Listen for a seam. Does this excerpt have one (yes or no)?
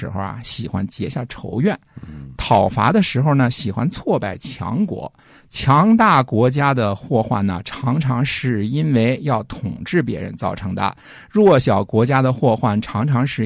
no